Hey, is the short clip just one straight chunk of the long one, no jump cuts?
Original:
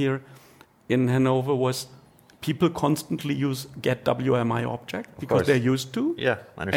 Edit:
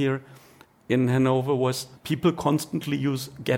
no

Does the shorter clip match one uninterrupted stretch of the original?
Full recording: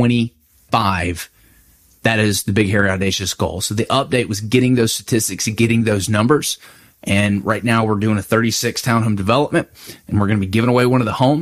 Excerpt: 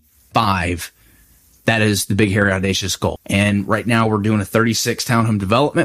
no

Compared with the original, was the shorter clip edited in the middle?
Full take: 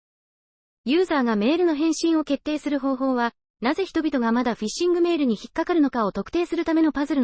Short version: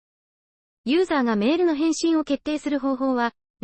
no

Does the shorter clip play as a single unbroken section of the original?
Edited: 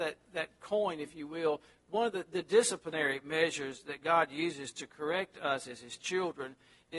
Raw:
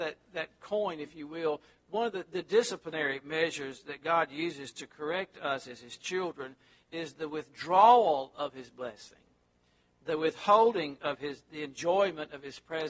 yes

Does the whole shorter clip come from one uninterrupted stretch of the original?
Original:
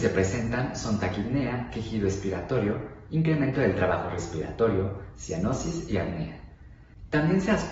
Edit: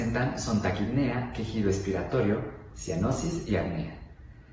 no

